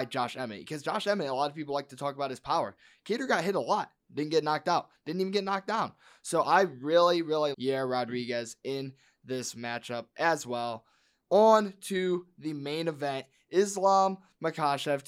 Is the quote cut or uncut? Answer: cut